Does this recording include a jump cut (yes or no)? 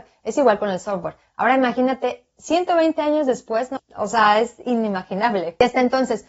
yes